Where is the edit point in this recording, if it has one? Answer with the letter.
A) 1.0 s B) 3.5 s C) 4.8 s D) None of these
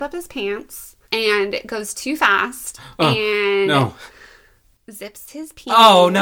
A